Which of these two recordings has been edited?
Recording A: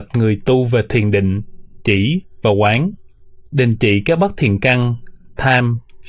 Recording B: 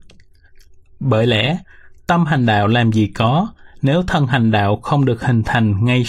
A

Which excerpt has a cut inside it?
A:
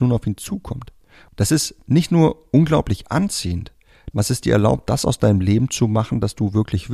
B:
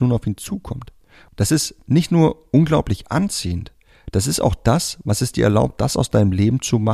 A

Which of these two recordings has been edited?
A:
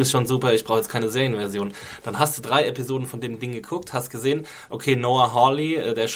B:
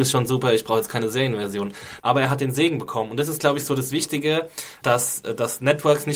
B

